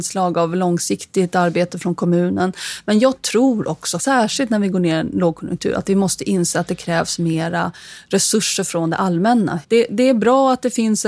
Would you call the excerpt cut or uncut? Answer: cut